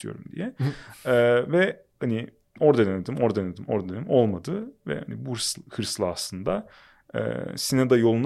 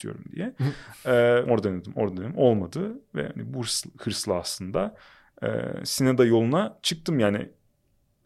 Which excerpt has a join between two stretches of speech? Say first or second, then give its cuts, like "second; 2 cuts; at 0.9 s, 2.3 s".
second; 1 cut; at 1.5 s